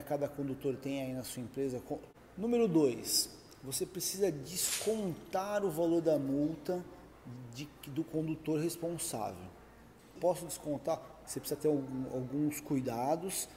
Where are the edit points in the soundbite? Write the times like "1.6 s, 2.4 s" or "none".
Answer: 10.2 s, 11.2 s